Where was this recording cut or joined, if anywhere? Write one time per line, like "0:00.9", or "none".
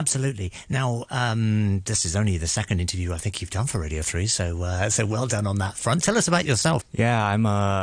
0:06.8

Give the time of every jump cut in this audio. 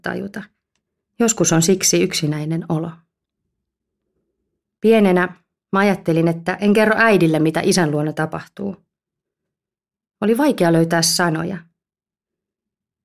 none

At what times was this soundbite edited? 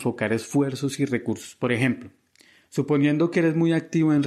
none

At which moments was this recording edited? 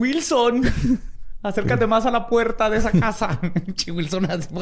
none

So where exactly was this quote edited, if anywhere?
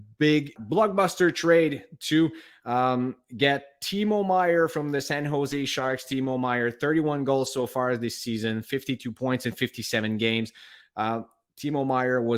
none

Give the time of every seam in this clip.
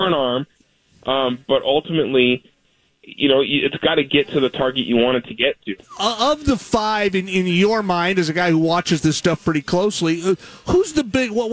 0:05.8

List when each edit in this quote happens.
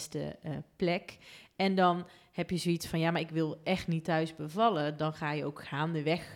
none

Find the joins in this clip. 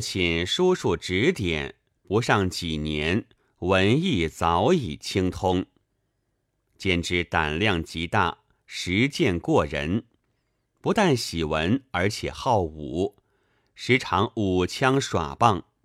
none

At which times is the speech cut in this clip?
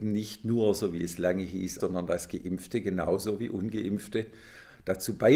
0:01.8

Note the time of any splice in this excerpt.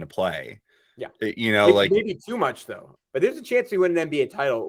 0:03.0

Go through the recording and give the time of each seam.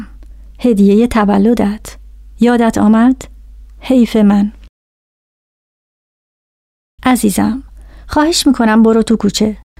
0:07.0

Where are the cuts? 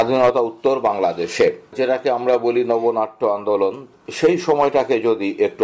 0:01.7

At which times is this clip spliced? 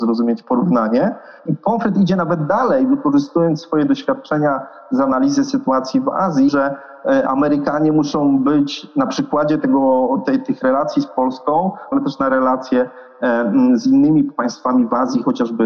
0:01.5
0:06.5
0:11.9

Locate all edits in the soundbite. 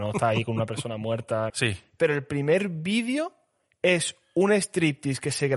0:01.5

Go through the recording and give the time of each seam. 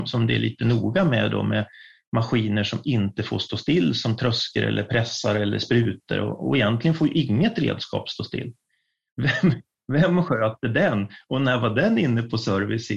0:09.1

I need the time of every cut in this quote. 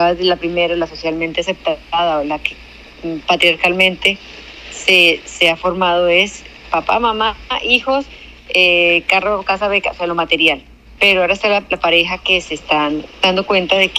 0:11.0

